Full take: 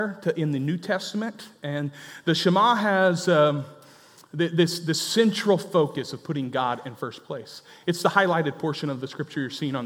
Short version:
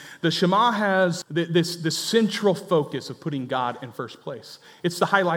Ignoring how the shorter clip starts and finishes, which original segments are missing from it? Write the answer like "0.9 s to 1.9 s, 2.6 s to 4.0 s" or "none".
3.3 s to 4.2 s